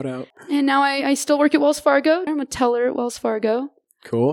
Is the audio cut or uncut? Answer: cut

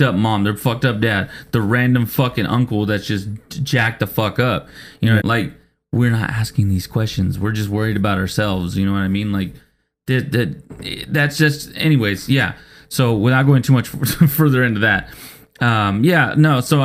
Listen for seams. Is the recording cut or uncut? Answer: cut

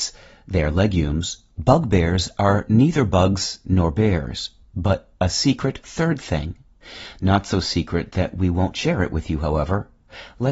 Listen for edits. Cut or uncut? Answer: uncut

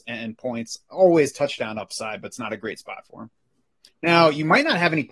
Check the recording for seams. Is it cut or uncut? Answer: cut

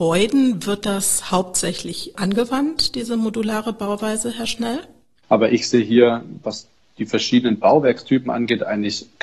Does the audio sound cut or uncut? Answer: cut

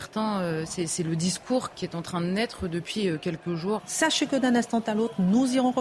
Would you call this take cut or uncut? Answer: cut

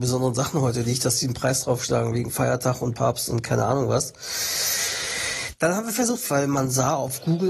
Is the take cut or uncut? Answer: cut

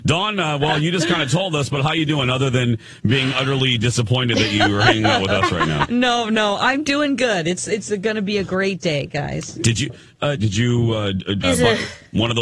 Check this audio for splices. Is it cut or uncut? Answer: cut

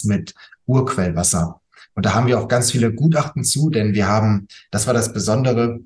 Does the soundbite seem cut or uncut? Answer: uncut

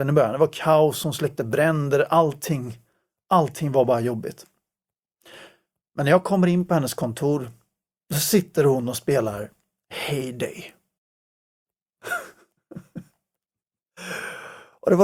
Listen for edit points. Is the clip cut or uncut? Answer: uncut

